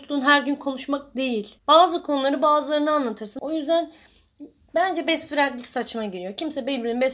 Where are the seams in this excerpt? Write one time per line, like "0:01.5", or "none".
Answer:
0:01.6
0:03.4